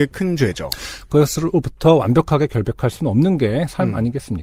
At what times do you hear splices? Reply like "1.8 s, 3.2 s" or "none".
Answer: none